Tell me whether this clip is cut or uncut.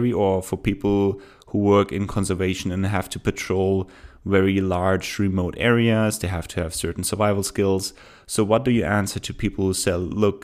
uncut